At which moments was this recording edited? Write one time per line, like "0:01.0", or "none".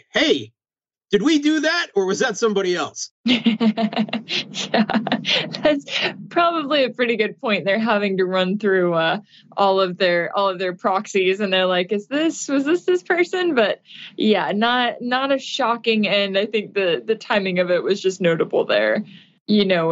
none